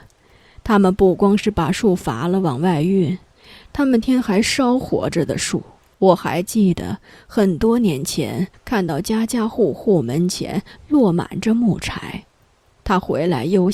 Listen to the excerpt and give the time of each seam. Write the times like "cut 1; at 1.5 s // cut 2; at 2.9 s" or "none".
cut 1; at 4.0 s // cut 2; at 5.9 s // cut 3; at 8.5 s